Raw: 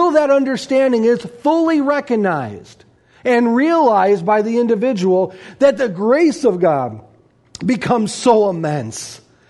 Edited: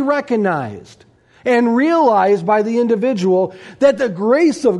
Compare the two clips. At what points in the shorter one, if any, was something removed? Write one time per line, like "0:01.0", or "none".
none